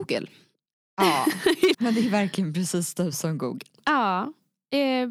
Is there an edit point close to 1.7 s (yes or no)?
yes